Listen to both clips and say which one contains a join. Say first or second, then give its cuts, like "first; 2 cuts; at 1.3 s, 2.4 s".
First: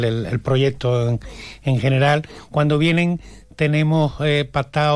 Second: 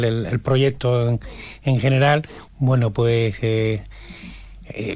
second; 1 cut; at 2.5 s